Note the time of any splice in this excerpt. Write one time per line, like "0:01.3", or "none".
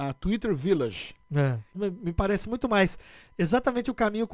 0:01.7